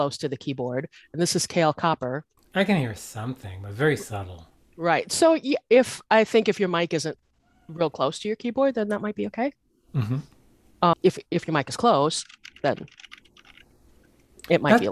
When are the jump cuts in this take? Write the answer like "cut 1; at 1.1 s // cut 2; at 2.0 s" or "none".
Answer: none